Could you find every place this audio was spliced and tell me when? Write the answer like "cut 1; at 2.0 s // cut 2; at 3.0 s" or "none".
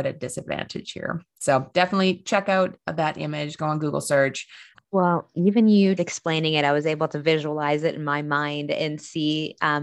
cut 1; at 4.7 s // cut 2; at 6.0 s